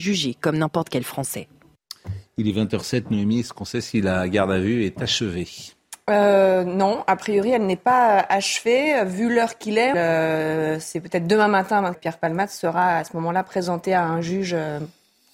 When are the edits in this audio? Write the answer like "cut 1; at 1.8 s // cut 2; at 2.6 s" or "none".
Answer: cut 1; at 9.9 s // cut 2; at 11.9 s